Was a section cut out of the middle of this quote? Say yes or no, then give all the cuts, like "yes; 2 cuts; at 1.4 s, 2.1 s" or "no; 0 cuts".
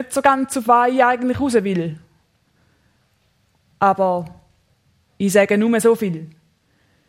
no; 0 cuts